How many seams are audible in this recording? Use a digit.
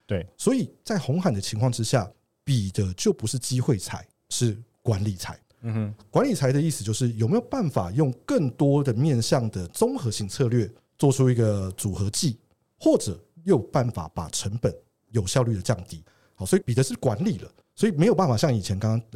0